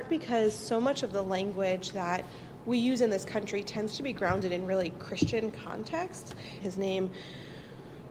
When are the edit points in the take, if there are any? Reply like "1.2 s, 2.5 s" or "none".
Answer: 6.6 s